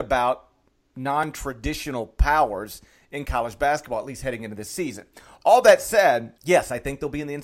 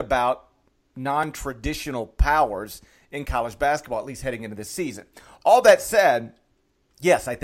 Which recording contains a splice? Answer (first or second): first